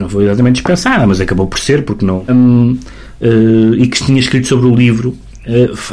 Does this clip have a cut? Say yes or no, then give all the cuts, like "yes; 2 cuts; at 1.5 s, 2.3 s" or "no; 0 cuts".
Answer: yes; 1 cut; at 2.3 s